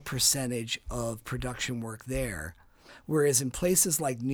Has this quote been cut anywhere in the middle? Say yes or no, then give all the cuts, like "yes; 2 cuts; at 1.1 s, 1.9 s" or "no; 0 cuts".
yes; 1 cut; at 2.9 s